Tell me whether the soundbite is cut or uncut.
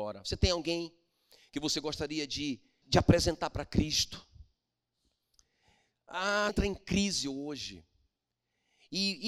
cut